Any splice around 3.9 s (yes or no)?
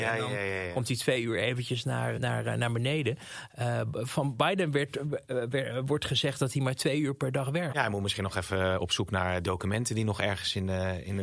no